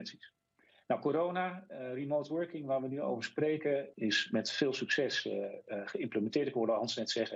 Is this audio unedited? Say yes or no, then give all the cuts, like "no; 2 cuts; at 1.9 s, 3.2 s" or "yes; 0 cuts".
no; 1 cut; at 3.9 s